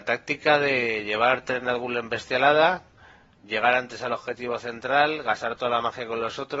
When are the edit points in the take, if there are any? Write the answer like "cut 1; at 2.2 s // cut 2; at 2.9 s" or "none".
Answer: none